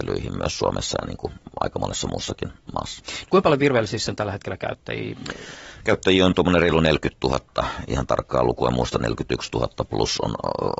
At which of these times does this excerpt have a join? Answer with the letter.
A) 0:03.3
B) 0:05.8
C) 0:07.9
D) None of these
A